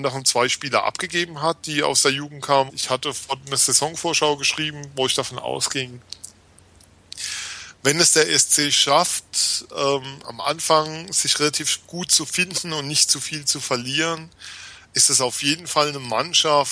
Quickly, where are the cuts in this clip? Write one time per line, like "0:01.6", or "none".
0:02.7